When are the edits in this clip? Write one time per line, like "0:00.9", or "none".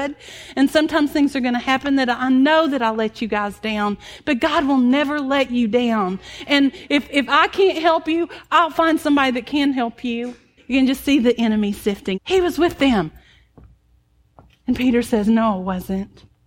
0:10.6
0:12.1